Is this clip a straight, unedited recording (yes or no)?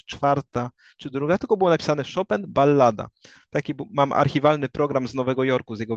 yes